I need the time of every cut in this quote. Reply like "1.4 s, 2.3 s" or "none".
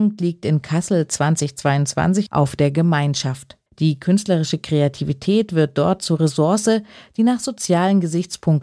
2.3 s, 3.7 s